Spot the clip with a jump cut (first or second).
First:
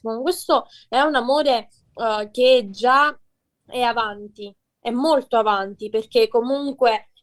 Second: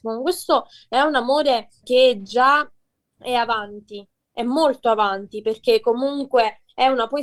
second